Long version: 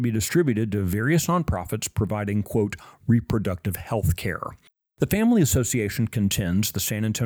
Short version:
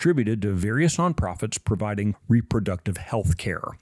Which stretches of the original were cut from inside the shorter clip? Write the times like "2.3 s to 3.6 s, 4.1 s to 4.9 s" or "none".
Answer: 2.4 s to 2.9 s